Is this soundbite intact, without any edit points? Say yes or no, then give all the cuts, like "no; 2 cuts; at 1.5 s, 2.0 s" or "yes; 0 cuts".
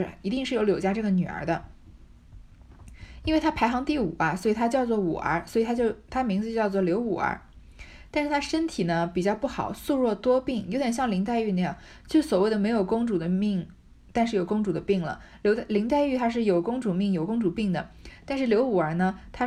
yes; 0 cuts